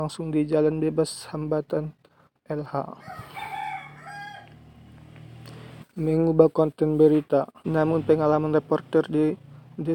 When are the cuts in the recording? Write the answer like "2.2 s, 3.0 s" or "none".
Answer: 5.8 s, 7.6 s